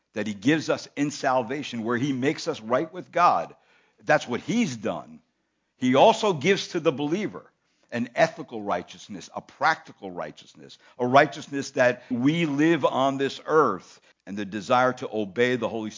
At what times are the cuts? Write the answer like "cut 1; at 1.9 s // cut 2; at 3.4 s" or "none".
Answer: cut 1; at 12.1 s // cut 2; at 14.1 s

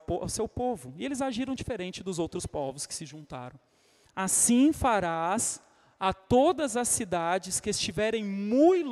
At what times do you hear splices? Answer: cut 1; at 4.1 s

